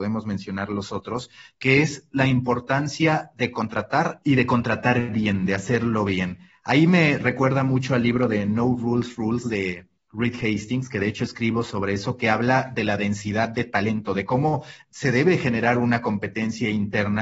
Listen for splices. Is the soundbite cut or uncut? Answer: uncut